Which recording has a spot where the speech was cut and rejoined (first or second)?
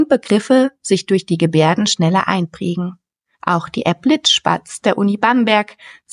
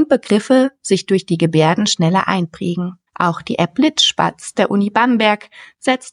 second